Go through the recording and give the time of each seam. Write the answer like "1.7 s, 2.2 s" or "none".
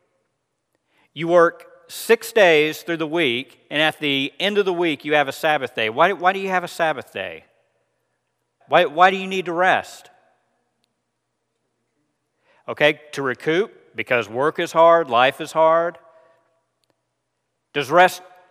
8.6 s